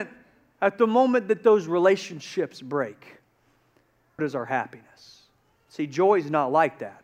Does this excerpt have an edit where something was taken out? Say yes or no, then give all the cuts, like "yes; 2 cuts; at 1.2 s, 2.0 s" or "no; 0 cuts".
yes; 1 cut; at 4.2 s